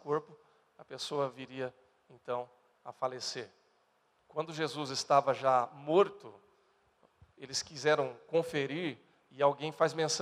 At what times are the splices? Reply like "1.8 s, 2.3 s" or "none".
none